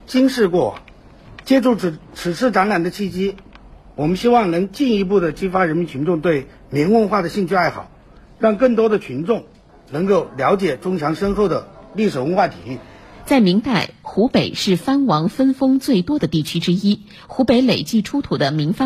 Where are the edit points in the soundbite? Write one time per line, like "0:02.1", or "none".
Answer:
none